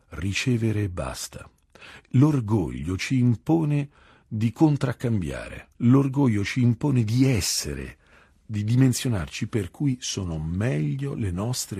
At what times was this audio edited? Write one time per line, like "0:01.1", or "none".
0:05.7